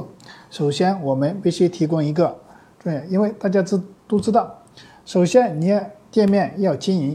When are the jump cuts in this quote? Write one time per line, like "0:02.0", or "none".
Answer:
0:02.7